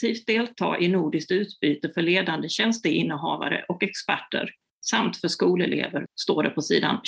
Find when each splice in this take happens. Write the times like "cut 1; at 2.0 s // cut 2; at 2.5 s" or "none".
cut 1; at 6.1 s